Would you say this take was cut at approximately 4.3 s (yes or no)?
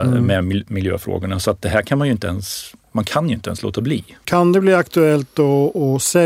yes